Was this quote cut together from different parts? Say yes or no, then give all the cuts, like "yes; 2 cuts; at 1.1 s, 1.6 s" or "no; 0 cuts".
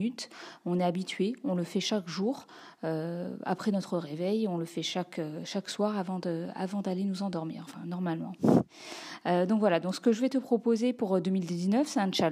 no; 0 cuts